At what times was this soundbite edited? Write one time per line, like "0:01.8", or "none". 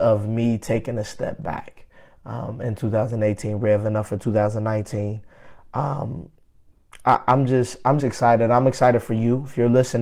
0:08.0